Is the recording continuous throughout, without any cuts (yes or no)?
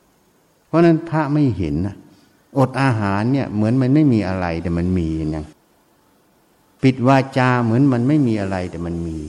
yes